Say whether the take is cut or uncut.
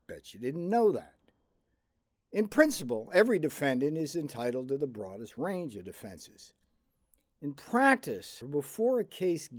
cut